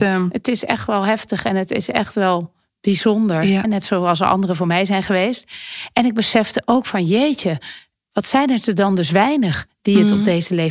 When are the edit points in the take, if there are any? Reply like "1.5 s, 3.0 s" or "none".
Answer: 3.6 s